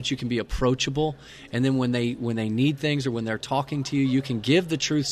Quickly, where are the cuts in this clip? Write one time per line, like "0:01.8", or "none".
none

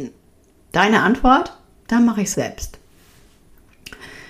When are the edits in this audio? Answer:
0:02.3

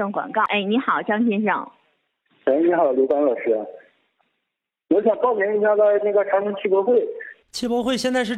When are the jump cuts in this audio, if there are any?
0:07.4

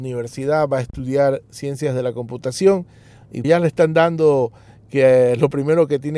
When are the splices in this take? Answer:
0:03.4

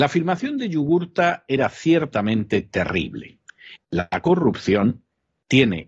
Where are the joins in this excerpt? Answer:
0:03.7

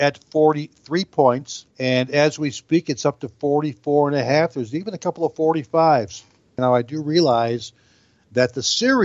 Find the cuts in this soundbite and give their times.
0:01.7
0:06.6

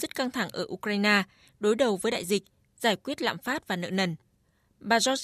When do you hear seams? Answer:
none

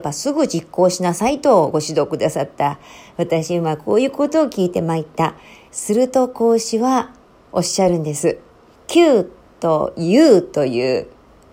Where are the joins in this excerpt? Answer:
0:05.7
0:08.8

